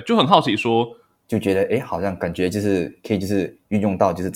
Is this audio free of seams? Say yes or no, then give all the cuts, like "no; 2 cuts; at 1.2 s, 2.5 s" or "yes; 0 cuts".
no; 1 cut; at 1.2 s